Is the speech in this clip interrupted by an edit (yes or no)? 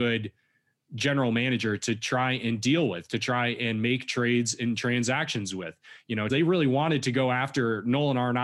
yes